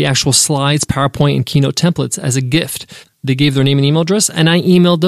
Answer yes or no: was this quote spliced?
yes